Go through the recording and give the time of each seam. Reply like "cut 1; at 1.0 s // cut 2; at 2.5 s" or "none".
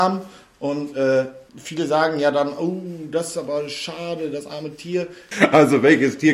cut 1; at 1.5 s // cut 2; at 5.3 s